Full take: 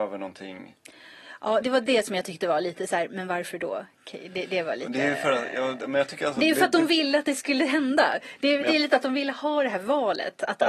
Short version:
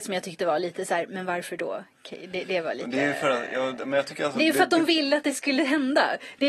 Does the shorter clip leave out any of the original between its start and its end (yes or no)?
no